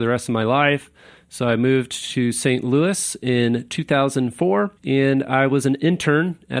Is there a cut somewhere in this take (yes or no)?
yes